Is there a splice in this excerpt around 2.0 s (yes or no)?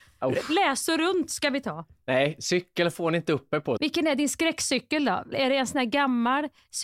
no